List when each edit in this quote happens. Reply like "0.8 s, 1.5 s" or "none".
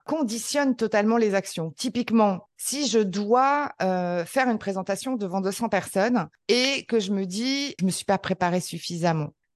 7.8 s